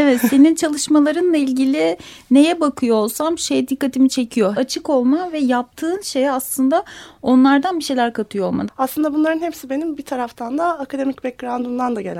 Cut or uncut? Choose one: cut